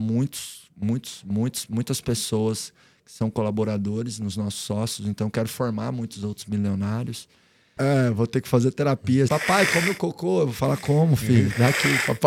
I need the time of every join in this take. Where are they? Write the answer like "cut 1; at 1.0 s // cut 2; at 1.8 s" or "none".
cut 1; at 7.8 s // cut 2; at 9.3 s